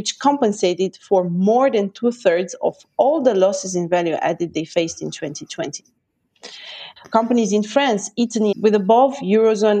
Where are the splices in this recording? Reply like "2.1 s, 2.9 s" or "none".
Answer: 7.0 s, 8.5 s